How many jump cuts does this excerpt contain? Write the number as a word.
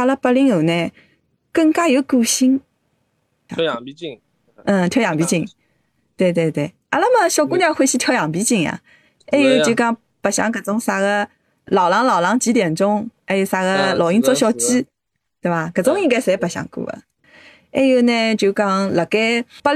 one